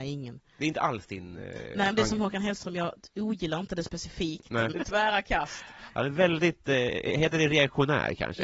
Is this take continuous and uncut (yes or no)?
no